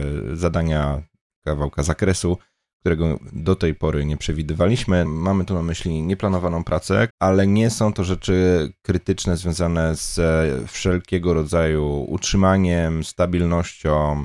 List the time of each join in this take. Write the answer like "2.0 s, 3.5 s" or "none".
5.1 s, 7.1 s